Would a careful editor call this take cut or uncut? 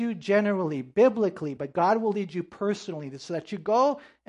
uncut